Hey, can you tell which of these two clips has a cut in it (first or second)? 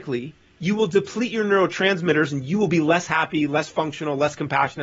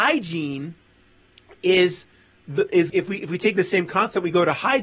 second